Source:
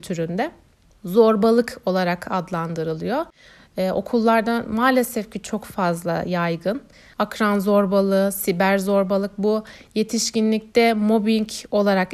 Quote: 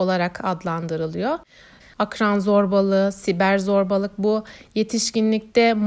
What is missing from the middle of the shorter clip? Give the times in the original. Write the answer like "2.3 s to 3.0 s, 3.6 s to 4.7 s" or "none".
3.7 s to 7.0 s